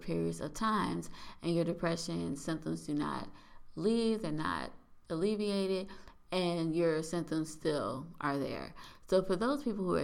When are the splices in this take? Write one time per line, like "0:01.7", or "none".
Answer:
none